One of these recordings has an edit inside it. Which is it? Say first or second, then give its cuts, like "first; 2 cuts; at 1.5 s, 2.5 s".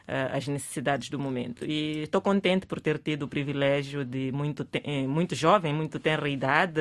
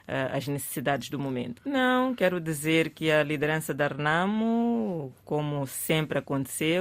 second; 1 cut; at 1.6 s